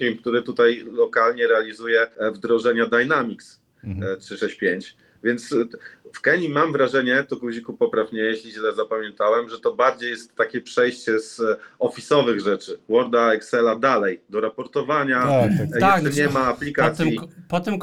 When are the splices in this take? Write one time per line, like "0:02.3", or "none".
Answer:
none